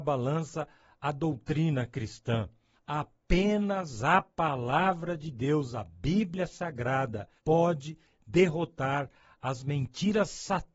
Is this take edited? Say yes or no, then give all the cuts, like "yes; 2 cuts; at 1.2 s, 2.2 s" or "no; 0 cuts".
yes; 2 cuts; at 2.7 s, 7.4 s